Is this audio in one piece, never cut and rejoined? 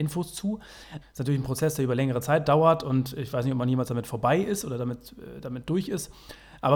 no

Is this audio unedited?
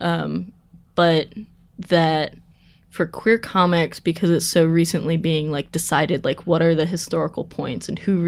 yes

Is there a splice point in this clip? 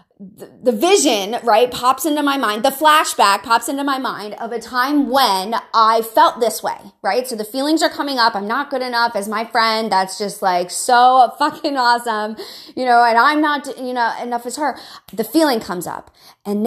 no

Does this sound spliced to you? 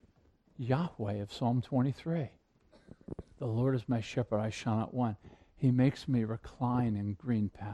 no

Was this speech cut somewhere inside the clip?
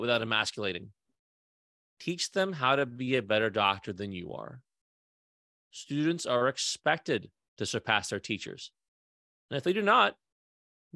no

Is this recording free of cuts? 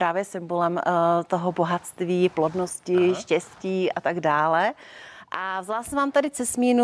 yes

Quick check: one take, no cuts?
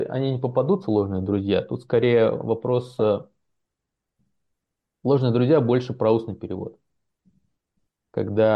yes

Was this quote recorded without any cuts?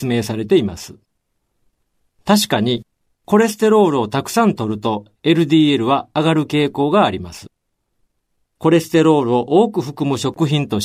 yes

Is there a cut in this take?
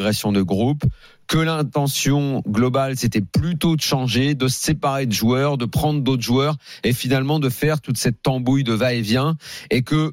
no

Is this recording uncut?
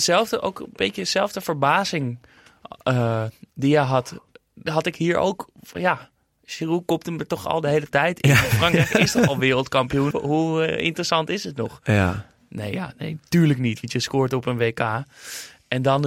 no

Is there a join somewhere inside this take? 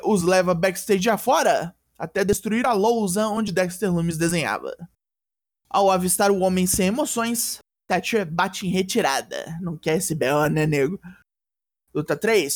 no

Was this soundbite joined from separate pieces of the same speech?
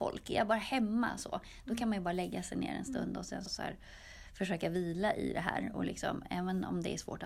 yes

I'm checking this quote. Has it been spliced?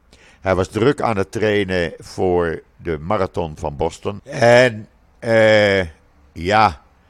yes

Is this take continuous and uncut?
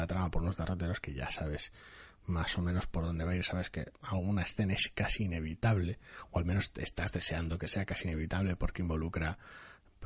yes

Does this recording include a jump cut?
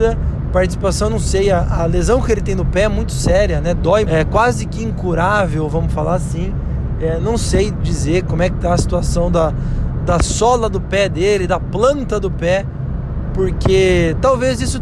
yes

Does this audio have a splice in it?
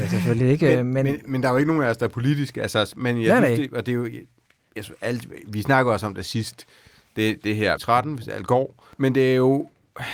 yes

